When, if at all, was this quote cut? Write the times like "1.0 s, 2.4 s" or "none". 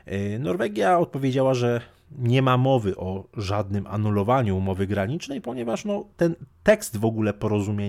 none